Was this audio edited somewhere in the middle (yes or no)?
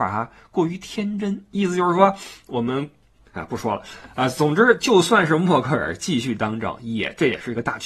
no